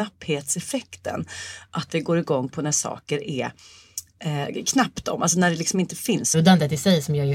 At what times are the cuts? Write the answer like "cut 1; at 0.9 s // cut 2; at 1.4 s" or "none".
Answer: cut 1; at 6.3 s